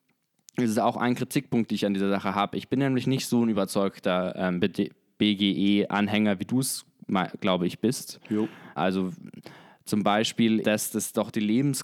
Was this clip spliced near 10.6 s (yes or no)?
yes